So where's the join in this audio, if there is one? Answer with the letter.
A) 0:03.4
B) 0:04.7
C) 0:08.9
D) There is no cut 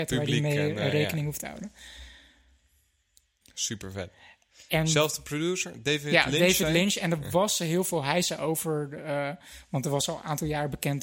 A